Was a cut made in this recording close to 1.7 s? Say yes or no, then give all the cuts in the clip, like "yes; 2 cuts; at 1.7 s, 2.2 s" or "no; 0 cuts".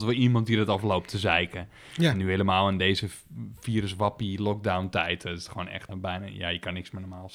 no; 1 cut; at 5.9 s